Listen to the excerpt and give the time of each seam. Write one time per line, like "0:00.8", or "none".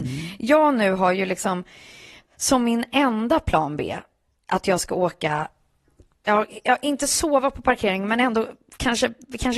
none

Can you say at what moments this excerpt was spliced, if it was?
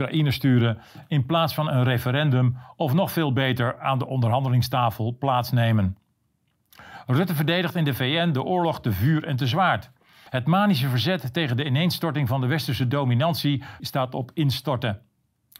0:10.3
0:13.8

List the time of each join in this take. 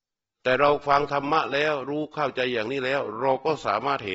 none

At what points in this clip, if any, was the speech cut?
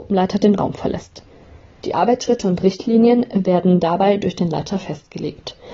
0:01.8

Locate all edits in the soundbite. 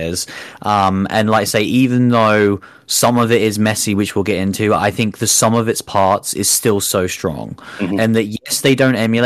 none

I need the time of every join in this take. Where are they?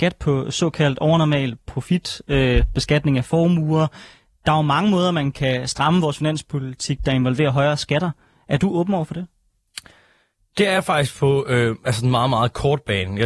none

